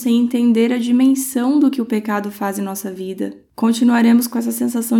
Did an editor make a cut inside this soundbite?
no; 0 cuts

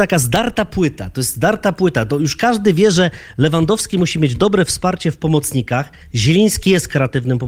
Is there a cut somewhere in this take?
no; 0 cuts

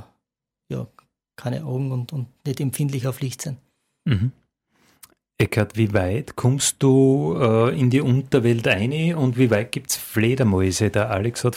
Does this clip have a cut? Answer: no; 0 cuts

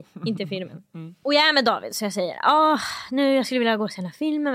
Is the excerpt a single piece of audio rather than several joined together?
yes; 0 cuts

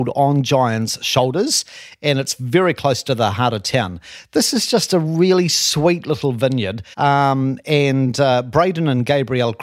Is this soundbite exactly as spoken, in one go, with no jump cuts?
no; 1 cut; at 6.9 s

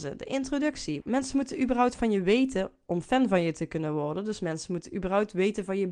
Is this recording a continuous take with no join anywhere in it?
no; 1 cut; at 1.0 s

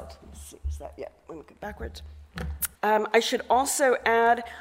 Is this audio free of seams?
no; 1 cut; at 2.8 s

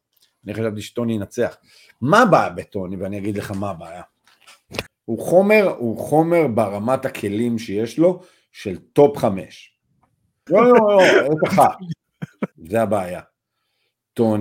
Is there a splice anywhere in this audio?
yes; 3 cuts; at 4.9 s, 10.5 s, 12.5 s

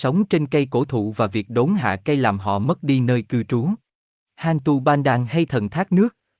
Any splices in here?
yes; 1 cut; at 4.3 s

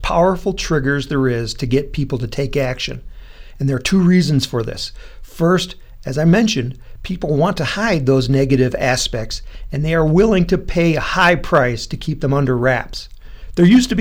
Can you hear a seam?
no; 0 cuts

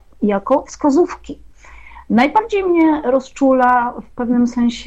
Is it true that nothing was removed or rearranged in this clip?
yes; 0 cuts

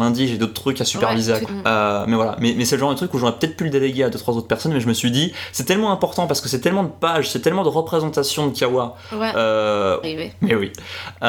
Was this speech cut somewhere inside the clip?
yes; 2 cuts; at 1.5 s, 10.0 s

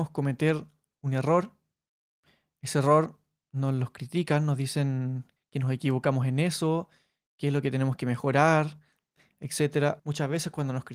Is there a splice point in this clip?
yes; 2 cuts; at 5.4 s, 10.0 s

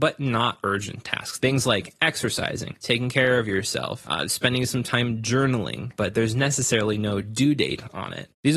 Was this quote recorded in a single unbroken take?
no; 2 cuts; at 1.4 s, 6.0 s

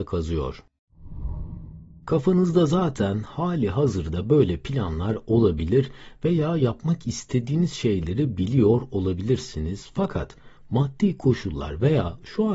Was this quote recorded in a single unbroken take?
yes; 0 cuts

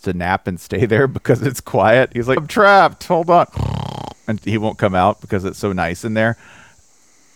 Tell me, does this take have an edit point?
yes; 2 cuts; at 2.4 s, 4.4 s

